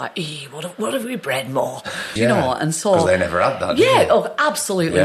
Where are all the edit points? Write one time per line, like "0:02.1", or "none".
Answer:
0:02.2